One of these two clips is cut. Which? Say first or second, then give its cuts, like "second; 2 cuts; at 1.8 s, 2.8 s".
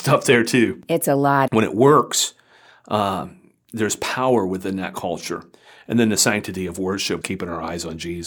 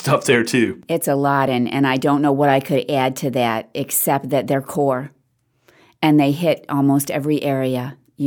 first; 2 cuts; at 1.5 s, 7.2 s